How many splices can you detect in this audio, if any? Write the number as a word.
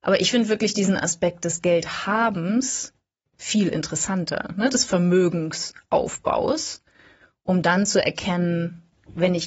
zero